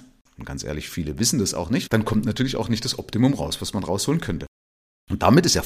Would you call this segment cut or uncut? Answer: cut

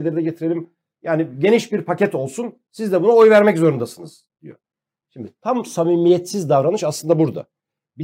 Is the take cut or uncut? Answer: uncut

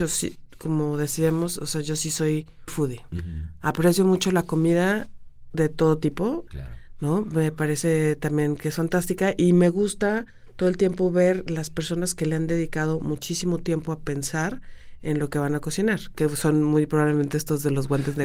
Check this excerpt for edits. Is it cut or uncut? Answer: cut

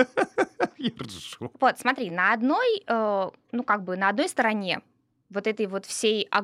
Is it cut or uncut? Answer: uncut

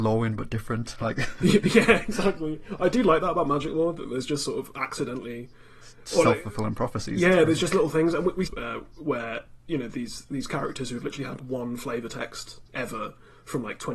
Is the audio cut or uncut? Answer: cut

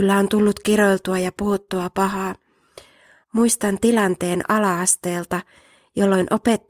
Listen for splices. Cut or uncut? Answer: cut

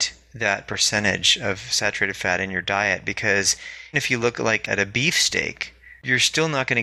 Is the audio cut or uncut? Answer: cut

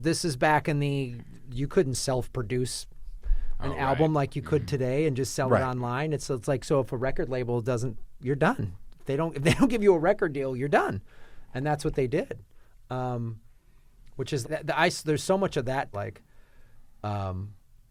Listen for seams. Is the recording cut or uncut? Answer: cut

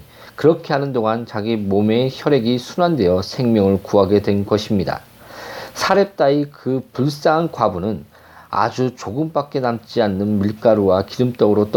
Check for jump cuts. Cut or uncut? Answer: uncut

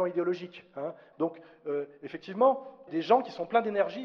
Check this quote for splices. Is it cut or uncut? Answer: cut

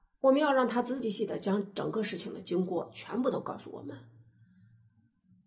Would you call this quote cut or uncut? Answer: cut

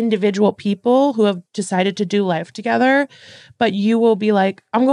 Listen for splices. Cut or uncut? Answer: uncut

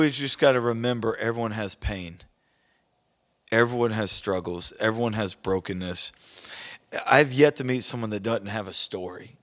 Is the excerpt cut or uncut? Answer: uncut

